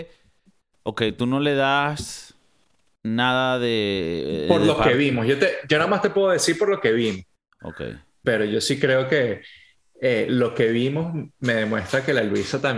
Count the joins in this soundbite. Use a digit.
1